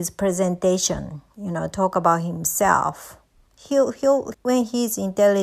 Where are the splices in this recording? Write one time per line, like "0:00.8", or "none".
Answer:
0:04.3